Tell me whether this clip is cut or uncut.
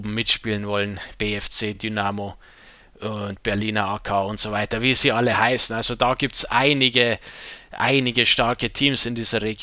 uncut